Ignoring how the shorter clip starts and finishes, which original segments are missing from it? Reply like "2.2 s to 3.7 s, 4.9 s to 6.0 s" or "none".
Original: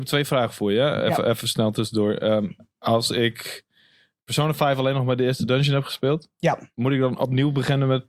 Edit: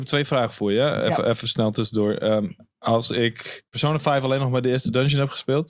3.7 s to 4.2 s